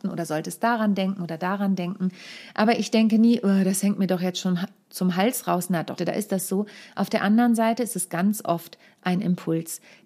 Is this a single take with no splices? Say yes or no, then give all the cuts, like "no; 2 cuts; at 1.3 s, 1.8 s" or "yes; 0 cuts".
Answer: no; 1 cut; at 6.0 s